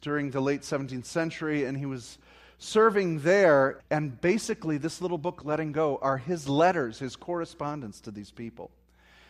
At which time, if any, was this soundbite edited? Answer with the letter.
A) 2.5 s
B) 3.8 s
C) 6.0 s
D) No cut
B